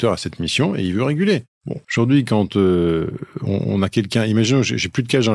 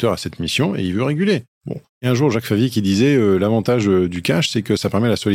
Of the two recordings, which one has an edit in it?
first; 1 cut; at 1.8 s

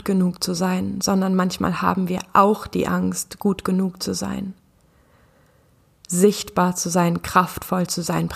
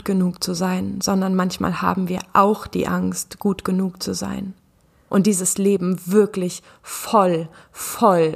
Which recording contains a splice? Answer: second; 1 cut; at 5.1 s

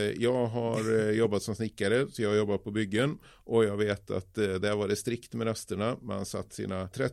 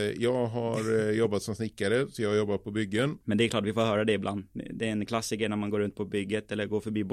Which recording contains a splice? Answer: second; 1 cut; at 3.2 s

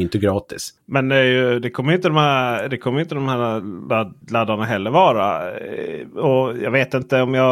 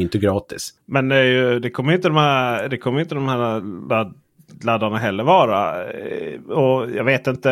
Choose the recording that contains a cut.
first; 1 cut; at 4.2 s

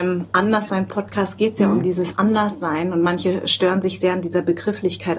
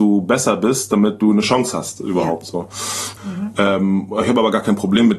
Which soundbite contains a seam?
second; 1 cut; at 3.2 s

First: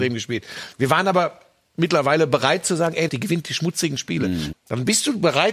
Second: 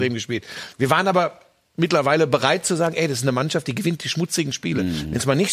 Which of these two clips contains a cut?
first; 2 cuts; at 3.1 s, 4.5 s

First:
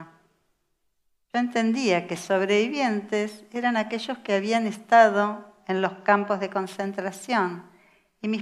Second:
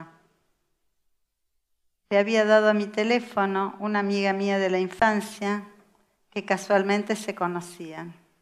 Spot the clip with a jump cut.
first; 1 cut; at 1.3 s

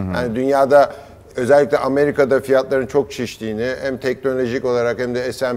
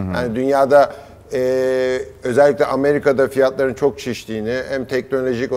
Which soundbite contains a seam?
first; 1 cut; at 1.3 s

